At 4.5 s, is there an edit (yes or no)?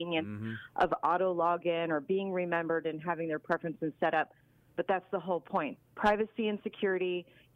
no